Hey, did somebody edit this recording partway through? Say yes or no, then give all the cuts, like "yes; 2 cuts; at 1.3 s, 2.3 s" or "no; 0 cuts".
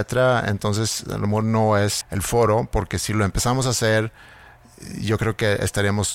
yes; 1 cut; at 2.0 s